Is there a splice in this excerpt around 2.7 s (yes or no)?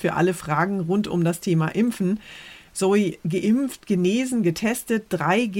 no